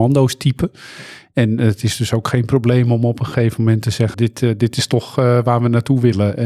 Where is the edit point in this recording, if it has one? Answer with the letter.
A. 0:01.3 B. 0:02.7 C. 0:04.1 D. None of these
C